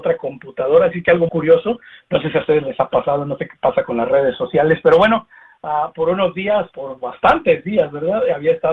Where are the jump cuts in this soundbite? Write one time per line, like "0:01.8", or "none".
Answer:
0:01.3
0:06.7